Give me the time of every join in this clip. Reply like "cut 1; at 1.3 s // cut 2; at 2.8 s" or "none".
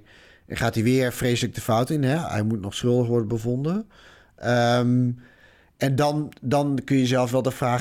none